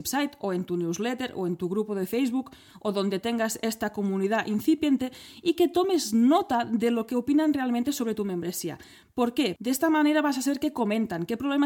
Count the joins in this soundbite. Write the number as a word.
zero